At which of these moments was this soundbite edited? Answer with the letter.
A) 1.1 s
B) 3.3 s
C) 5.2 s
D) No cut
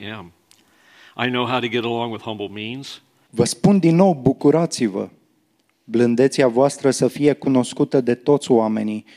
B